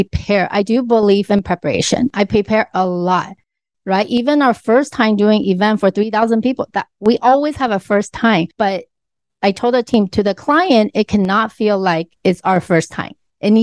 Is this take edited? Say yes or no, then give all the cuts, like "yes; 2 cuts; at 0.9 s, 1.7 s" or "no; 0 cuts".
no; 0 cuts